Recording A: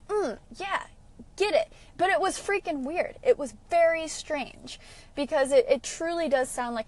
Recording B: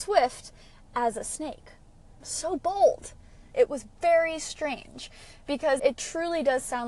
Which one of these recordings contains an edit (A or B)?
B